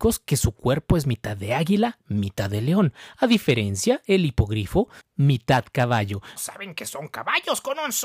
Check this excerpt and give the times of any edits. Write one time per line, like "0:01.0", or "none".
0:05.0
0:06.4